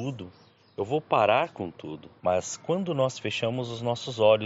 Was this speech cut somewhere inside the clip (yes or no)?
yes